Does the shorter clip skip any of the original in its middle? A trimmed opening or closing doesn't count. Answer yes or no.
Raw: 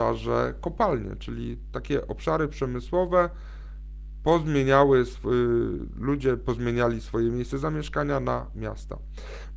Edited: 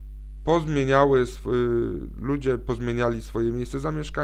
no